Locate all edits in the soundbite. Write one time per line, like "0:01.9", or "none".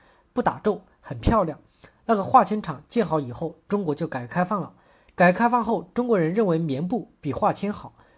none